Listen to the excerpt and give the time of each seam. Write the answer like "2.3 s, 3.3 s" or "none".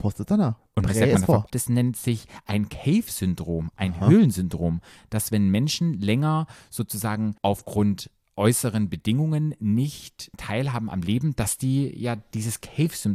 1.5 s, 7.4 s